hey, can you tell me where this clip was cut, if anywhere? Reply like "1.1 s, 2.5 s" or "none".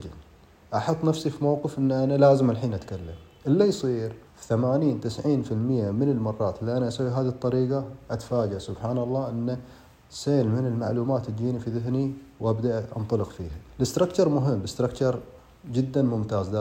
4.3 s, 13.7 s